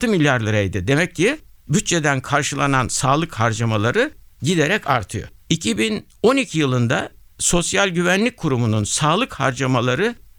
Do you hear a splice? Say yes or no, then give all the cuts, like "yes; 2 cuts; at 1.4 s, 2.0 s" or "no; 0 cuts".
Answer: yes; 1 cut; at 5.4 s